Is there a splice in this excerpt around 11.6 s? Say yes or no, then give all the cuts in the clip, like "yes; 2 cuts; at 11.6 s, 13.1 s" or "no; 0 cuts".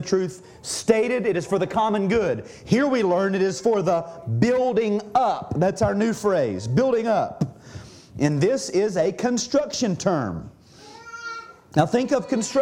no; 0 cuts